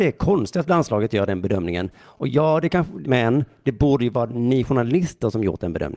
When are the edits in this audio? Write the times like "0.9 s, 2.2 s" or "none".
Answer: 3.0 s